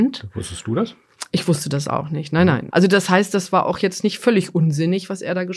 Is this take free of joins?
no; 1 cut; at 2.7 s

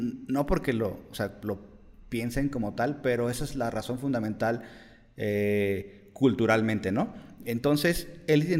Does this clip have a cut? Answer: no; 0 cuts

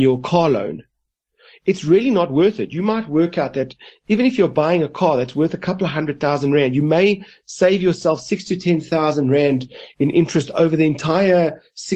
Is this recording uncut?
yes; 0 cuts

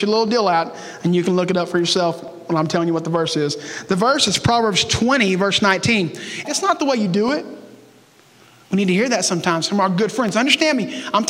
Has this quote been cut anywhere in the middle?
yes; 1 cut; at 6.4 s

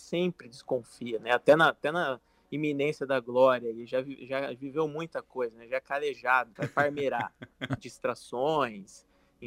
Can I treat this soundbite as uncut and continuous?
no; 2 cuts; at 6.6 s, 7.8 s

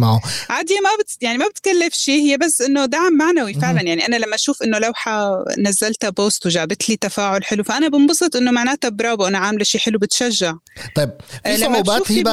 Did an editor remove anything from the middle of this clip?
no; 0 cuts

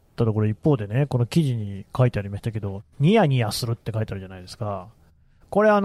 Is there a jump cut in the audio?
no; 0 cuts

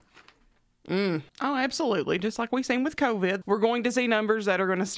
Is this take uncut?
no; 2 cuts; at 1.3 s, 3.4 s

